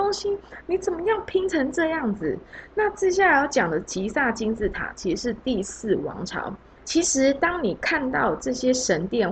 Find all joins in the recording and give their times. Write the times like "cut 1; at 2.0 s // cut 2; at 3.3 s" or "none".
cut 1; at 6.8 s